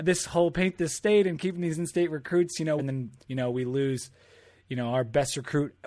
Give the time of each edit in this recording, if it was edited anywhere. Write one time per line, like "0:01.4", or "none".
0:02.8